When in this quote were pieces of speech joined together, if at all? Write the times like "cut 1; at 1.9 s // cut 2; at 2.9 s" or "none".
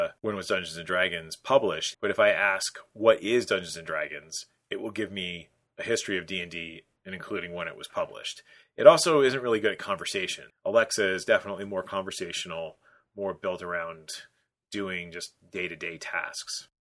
cut 1; at 1.9 s // cut 2; at 10.5 s